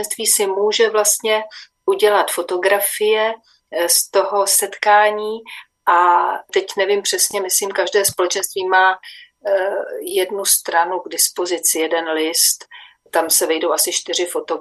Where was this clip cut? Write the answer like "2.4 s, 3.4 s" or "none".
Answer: none